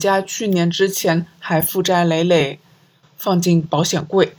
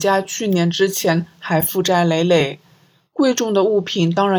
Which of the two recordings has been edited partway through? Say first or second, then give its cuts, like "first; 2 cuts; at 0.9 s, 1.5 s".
first; 1 cut; at 3.0 s